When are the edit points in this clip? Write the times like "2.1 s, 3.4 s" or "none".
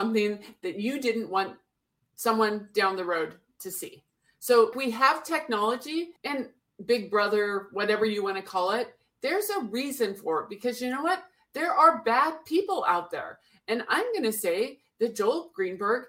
4.7 s, 6.2 s